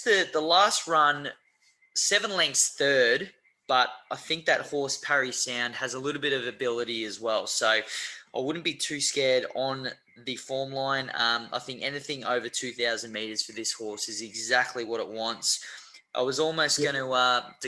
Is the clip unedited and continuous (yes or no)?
yes